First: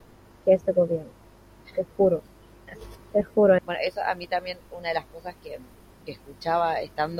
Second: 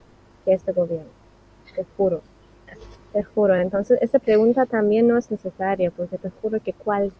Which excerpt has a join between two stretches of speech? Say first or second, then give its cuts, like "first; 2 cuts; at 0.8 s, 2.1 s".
first; 1 cut; at 3.6 s